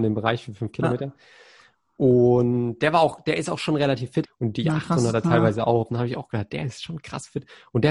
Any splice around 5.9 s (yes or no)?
yes